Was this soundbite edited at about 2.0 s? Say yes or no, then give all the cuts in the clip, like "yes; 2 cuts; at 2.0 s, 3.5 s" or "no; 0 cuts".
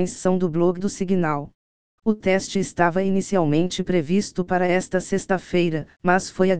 yes; 1 cut; at 2.0 s